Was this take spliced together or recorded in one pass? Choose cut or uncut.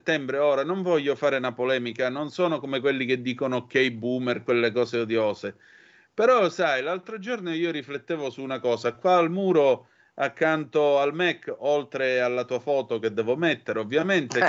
uncut